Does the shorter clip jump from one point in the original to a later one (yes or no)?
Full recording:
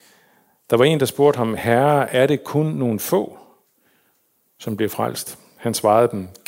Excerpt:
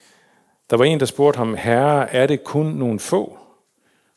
no